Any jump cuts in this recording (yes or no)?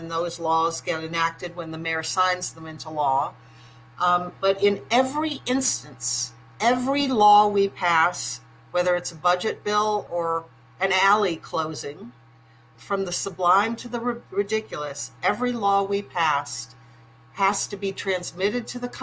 yes